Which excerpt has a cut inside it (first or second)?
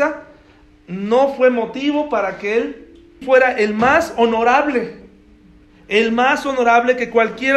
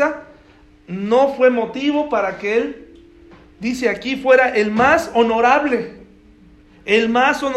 first